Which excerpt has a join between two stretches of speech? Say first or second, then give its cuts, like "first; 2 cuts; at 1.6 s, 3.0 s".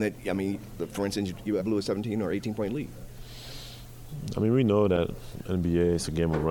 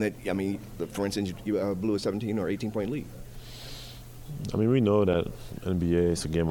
first; 1 cut; at 1.6 s